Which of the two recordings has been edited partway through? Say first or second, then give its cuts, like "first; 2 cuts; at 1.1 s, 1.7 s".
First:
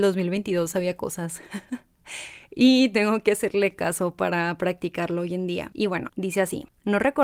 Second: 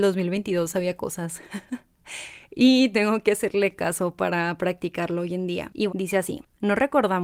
second; 1 cut; at 5.9 s